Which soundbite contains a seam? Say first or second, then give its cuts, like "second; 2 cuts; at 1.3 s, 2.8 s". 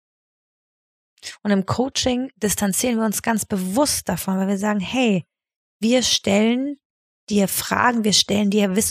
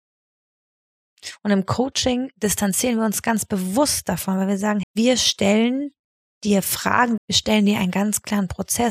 second; 2 cuts; at 4.8 s, 7.2 s